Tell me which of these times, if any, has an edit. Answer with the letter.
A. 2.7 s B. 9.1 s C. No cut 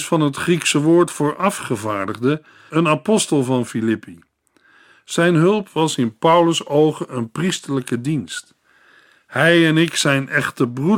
A